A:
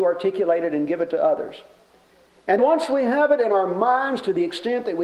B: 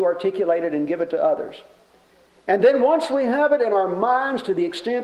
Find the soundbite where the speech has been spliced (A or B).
A